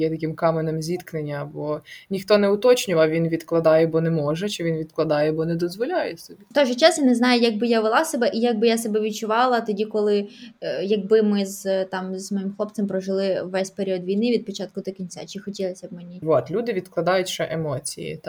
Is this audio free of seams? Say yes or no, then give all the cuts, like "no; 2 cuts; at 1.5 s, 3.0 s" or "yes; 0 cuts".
no; 1 cut; at 16.2 s